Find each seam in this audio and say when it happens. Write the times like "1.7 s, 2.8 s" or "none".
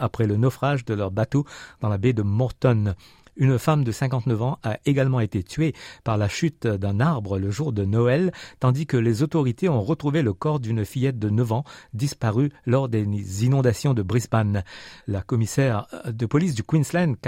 15.0 s